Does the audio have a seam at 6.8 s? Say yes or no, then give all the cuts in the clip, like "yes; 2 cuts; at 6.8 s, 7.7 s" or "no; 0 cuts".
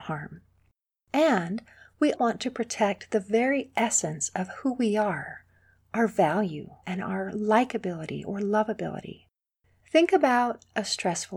yes; 3 cuts; at 2.1 s, 6.8 s, 9.8 s